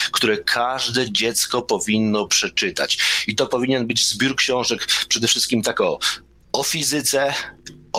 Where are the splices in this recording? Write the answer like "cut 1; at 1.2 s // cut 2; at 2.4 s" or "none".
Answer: none